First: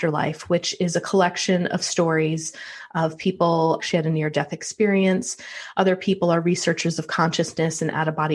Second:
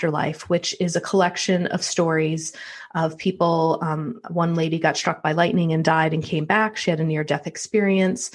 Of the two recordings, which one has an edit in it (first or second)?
first